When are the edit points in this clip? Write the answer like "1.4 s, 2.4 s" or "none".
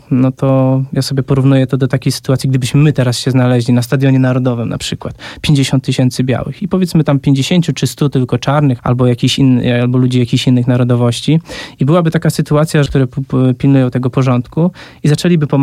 8.8 s, 12.9 s